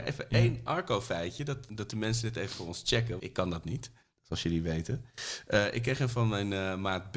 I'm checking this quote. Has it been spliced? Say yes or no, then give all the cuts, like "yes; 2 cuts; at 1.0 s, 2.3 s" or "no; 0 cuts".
yes; 2 cuts; at 1.7 s, 3.2 s